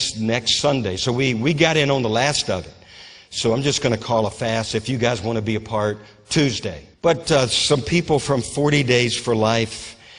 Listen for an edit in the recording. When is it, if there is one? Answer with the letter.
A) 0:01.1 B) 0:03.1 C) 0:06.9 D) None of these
C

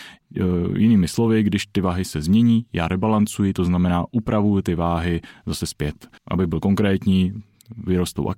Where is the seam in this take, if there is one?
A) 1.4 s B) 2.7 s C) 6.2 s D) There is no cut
C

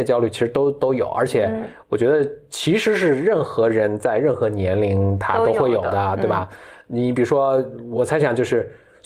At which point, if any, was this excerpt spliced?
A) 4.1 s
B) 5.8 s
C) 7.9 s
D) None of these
C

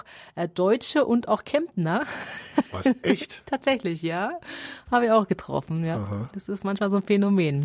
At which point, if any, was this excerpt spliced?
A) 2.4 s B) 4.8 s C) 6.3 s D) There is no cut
D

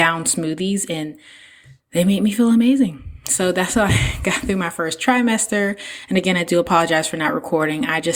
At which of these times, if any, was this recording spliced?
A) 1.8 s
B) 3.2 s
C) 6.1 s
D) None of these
D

